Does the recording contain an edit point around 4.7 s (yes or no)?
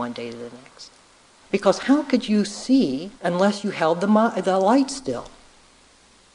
no